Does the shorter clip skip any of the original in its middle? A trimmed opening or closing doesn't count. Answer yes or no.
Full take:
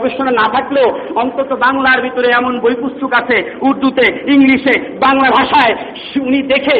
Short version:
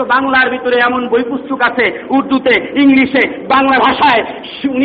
no